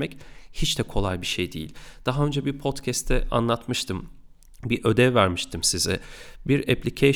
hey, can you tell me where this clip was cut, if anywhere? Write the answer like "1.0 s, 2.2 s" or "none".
none